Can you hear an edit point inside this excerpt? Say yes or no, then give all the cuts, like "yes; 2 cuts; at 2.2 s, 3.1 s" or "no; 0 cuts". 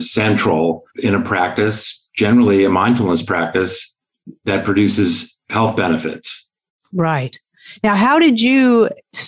no; 0 cuts